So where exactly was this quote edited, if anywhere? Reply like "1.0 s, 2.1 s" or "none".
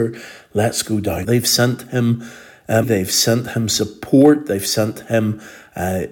1.2 s, 2.8 s